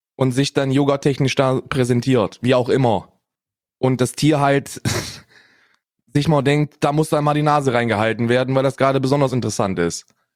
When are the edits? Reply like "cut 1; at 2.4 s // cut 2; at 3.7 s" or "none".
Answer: none